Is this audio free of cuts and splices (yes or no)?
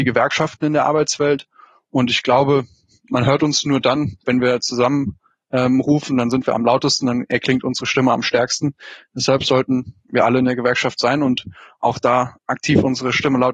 yes